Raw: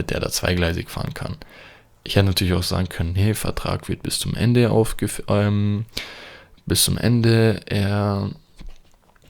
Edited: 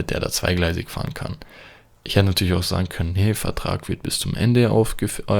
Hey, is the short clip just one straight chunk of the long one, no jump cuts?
yes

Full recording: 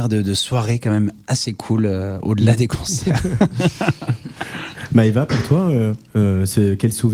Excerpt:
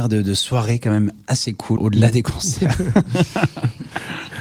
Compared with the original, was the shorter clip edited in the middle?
yes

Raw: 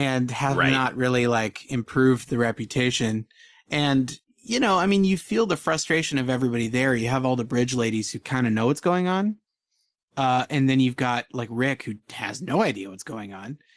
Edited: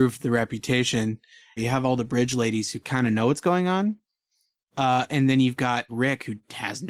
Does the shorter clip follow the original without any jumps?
no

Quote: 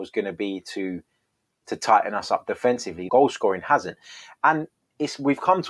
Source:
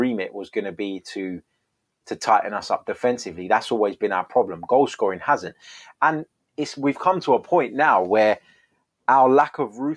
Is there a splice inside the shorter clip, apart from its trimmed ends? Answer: yes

